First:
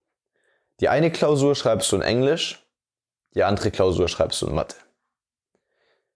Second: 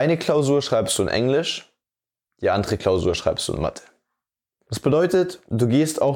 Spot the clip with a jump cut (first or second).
second